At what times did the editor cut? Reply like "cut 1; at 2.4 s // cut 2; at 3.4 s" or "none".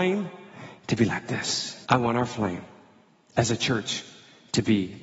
cut 1; at 1.8 s